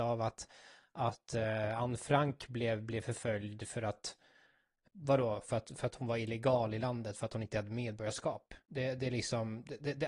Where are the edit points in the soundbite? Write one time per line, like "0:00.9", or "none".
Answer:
0:04.9
0:08.6